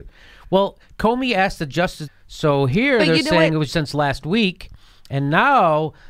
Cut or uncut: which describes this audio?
cut